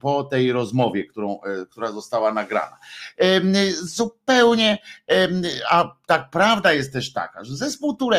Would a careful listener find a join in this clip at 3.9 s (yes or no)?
no